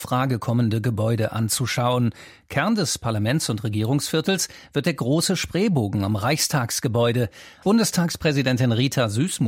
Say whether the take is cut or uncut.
cut